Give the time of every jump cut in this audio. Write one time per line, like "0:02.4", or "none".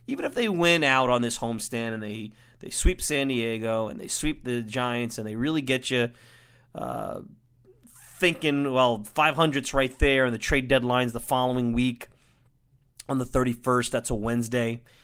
none